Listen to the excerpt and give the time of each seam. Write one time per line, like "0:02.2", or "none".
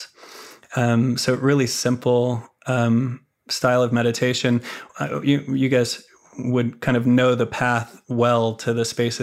none